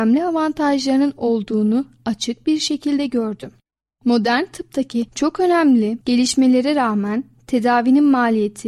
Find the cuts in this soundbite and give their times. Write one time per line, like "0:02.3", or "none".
none